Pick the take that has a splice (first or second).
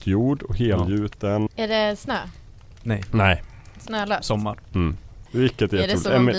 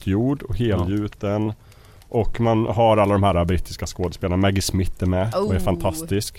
first